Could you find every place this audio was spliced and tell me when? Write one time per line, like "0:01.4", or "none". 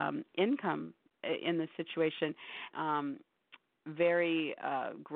0:02.7